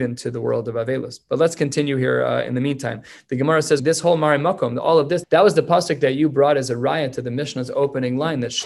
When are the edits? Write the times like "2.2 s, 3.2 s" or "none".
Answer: 3.8 s, 5.2 s